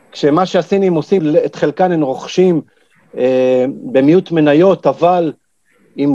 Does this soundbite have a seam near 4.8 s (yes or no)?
no